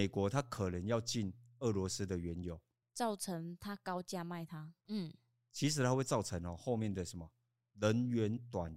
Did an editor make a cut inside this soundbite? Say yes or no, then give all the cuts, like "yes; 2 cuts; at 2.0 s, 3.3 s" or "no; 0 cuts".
yes; 2 cuts; at 2.8 s, 4.9 s